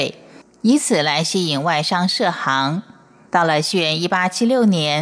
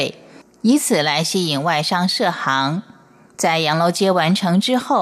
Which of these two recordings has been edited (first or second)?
first